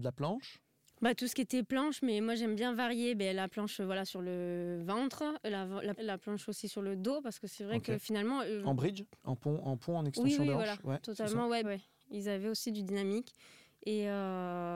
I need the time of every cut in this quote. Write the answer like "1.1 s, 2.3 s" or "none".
6.0 s, 9.2 s, 11.6 s